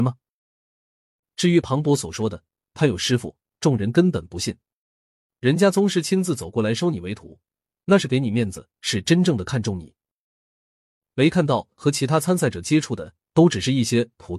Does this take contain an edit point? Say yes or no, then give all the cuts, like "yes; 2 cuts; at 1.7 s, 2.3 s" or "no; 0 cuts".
yes; 2 cuts; at 1.2 s, 5.3 s